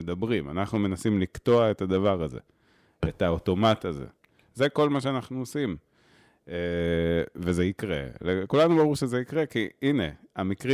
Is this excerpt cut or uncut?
uncut